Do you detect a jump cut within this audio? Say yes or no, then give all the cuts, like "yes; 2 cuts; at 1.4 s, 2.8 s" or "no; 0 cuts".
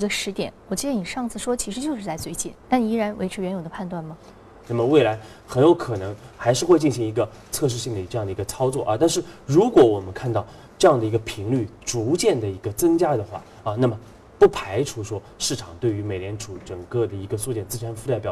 yes; 2 cuts; at 2.6 s, 4.6 s